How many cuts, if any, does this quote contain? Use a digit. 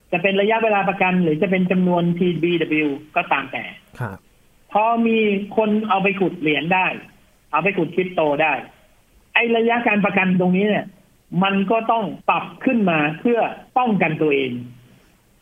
2